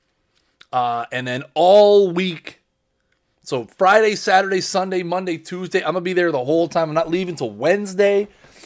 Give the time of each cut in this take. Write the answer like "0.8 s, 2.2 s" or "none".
none